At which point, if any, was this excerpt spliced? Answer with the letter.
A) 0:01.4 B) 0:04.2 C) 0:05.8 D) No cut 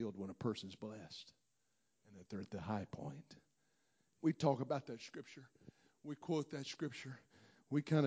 B